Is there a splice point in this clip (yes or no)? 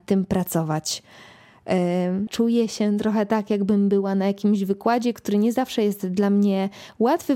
yes